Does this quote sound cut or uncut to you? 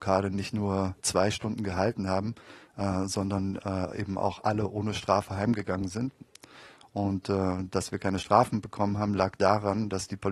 uncut